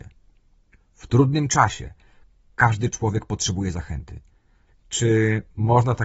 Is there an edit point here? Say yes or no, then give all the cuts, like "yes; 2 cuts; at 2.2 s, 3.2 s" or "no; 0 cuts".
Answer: yes; 1 cut; at 4.7 s